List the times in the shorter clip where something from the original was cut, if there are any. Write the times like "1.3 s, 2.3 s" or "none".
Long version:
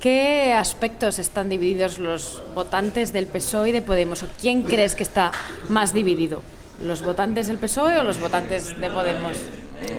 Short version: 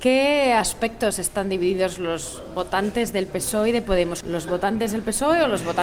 4.2 s

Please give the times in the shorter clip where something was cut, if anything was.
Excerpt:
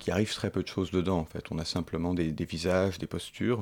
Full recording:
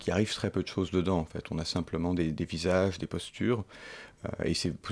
none

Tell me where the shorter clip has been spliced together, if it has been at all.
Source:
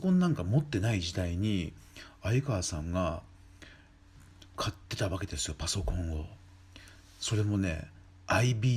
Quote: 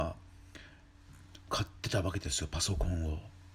none

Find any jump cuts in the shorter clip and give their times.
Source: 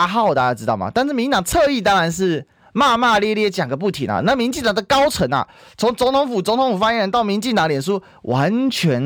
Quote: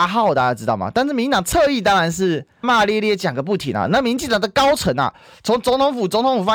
2.6 s

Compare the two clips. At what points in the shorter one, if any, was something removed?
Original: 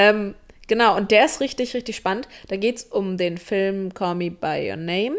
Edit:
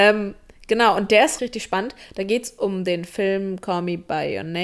1.4 s

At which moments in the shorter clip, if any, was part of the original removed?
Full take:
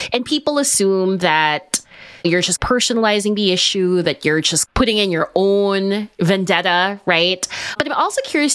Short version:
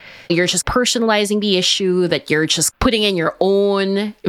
none

